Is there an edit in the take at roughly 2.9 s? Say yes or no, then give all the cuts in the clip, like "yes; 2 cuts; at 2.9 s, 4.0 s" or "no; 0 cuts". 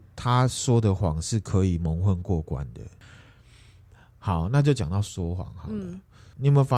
no; 0 cuts